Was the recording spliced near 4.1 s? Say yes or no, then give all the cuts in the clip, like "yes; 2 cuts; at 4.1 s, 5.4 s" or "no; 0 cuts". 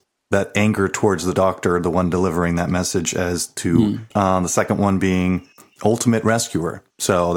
yes; 1 cut; at 4.1 s